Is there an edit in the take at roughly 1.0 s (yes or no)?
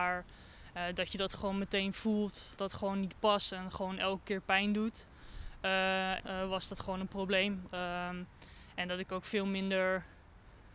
no